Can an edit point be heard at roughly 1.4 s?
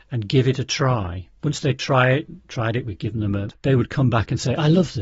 yes; 2 cuts; at 1.4 s, 3.5 s

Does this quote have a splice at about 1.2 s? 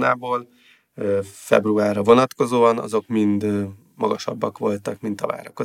no; 0 cuts

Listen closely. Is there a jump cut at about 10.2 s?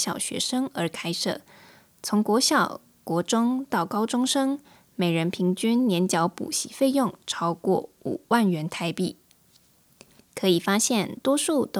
yes; 1 cut; at 10.2 s

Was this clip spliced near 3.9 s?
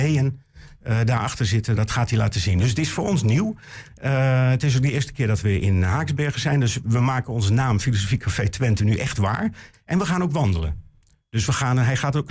no; 3 cuts; at 1.8 s, 6.8 s, 9.7 s

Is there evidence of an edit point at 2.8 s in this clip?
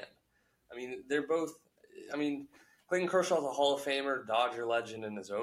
no; 0 cuts

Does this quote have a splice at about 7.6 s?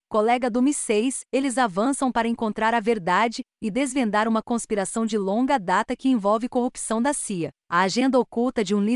no; 1 cut; at 1.3 s

